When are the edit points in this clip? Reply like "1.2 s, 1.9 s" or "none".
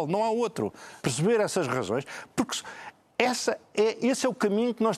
1.0 s